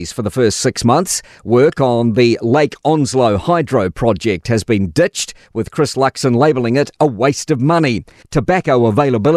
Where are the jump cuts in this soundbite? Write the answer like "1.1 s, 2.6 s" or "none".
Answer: 8.2 s